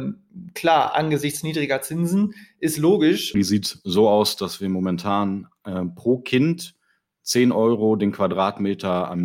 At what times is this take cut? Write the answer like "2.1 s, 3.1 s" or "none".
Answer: 3.3 s